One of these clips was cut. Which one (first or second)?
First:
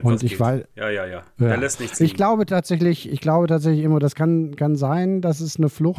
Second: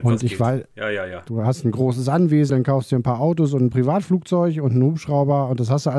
second